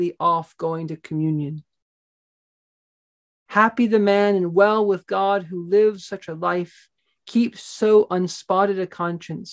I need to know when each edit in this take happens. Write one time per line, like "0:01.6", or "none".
none